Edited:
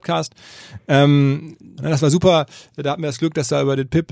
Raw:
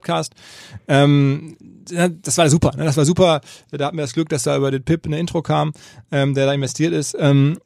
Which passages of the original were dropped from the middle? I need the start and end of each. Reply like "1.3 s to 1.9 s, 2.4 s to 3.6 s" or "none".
1.8 s to 2.7 s